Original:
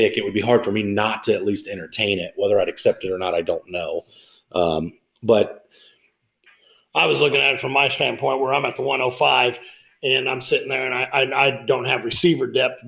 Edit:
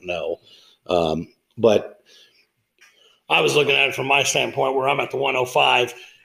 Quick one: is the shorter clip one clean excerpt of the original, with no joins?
yes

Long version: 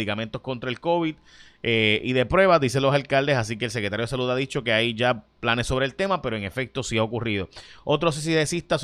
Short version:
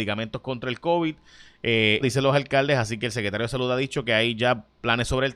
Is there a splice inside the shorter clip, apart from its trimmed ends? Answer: yes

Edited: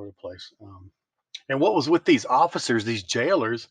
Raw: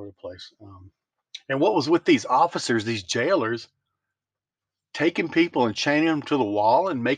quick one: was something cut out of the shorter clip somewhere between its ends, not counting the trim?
no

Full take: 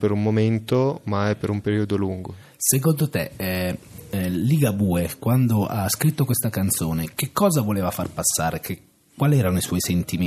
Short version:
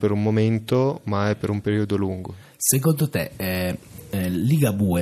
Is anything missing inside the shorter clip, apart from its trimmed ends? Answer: no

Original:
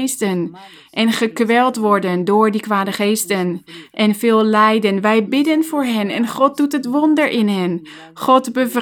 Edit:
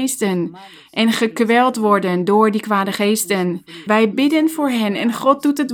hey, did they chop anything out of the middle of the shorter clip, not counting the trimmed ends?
yes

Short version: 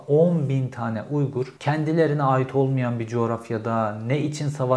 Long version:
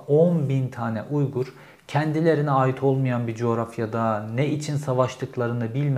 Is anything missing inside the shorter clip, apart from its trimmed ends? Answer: yes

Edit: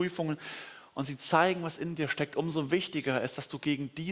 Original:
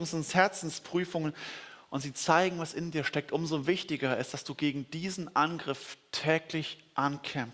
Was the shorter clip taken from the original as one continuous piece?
yes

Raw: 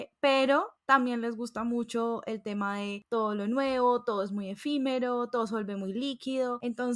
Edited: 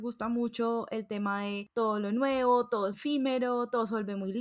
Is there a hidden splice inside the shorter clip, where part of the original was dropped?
yes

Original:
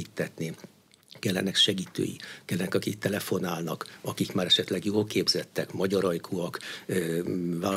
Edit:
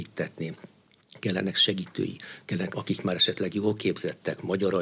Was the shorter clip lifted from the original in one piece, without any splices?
no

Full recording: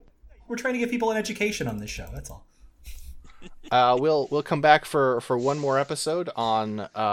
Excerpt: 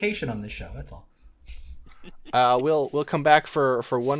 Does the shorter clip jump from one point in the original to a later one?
no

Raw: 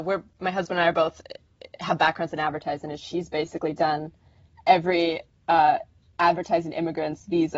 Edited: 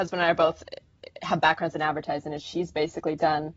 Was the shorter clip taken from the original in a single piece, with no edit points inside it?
yes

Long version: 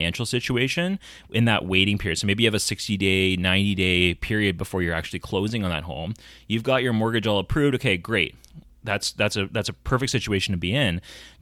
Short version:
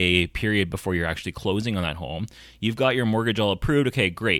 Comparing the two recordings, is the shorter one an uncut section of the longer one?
yes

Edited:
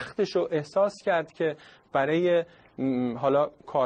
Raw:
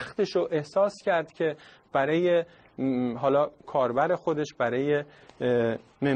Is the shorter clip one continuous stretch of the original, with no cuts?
yes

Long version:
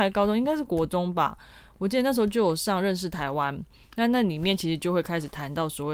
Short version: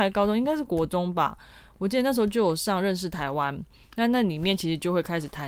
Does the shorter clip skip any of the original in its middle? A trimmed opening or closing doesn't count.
no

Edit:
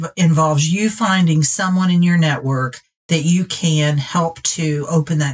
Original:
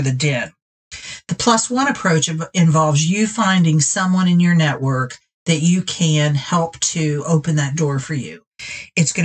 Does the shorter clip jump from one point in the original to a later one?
no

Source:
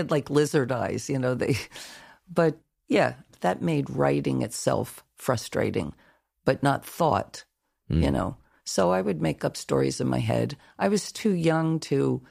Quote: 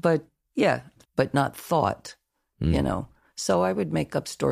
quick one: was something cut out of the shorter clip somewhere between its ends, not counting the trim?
yes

